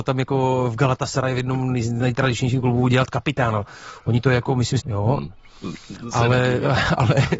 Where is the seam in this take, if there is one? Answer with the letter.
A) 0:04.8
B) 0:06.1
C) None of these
A